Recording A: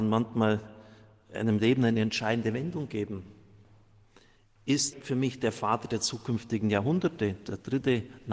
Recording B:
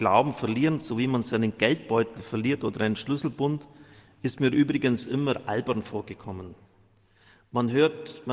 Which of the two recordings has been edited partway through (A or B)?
A